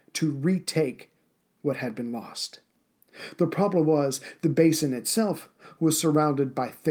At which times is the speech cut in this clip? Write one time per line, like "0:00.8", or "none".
none